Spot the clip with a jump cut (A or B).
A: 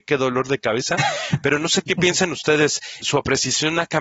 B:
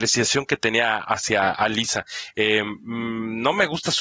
A